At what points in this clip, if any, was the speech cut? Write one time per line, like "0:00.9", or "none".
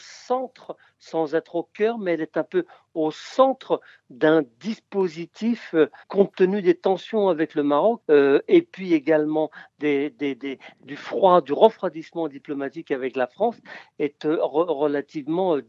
0:06.0
0:08.0